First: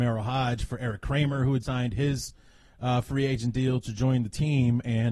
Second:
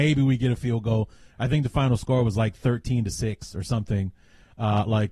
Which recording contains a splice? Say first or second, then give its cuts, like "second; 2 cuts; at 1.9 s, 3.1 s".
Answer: first; 1 cut; at 1.6 s